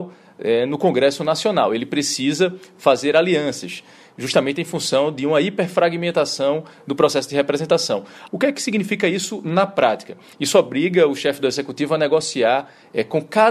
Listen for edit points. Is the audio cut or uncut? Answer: cut